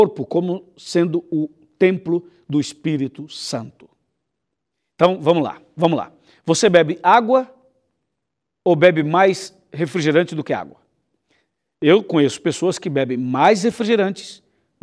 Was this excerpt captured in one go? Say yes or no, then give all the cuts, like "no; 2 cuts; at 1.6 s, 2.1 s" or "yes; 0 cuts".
yes; 0 cuts